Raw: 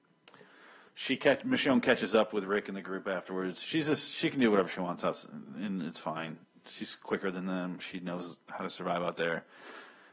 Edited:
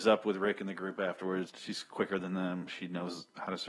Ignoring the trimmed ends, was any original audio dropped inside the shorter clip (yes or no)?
yes